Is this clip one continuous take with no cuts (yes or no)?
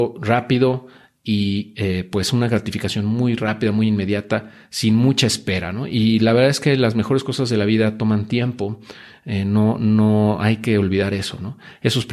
yes